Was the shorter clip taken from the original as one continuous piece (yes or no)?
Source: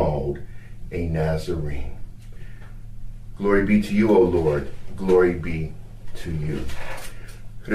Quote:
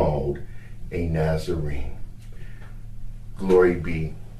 no